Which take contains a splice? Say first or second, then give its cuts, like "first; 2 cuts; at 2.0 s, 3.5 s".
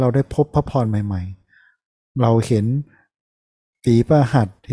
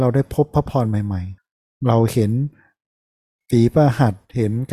second; 1 cut; at 1.4 s